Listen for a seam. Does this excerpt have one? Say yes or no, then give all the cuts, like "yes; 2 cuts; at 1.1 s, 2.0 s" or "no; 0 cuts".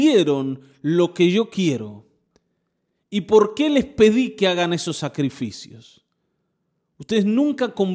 no; 0 cuts